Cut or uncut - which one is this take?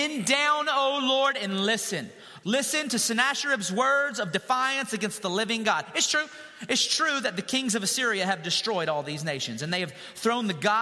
cut